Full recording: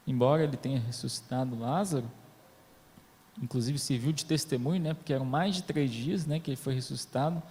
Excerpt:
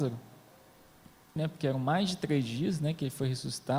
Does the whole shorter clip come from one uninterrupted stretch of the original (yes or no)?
no